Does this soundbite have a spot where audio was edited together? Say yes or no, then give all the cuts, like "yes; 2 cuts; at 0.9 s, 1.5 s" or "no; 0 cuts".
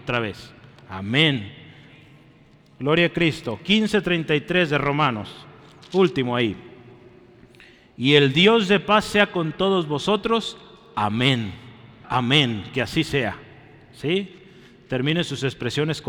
yes; 1 cut; at 12.0 s